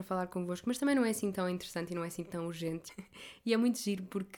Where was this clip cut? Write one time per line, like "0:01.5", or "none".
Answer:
0:02.9